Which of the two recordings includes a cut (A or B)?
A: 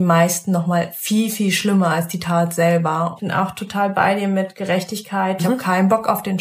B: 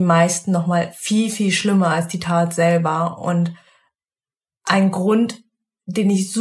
A